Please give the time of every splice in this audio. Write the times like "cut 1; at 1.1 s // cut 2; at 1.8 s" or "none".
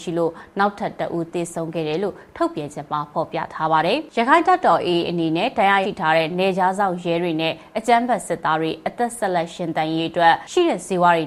cut 1; at 5.8 s